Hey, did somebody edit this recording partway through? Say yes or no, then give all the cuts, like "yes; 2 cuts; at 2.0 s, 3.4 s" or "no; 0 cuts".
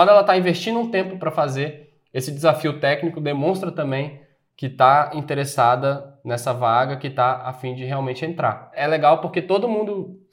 no; 0 cuts